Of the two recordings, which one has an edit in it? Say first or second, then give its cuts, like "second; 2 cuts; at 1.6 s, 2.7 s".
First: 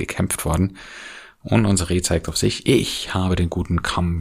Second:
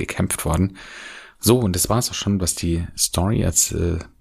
second; 1 cut; at 1.3 s